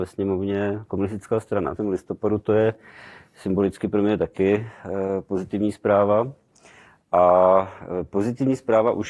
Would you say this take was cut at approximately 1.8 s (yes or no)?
yes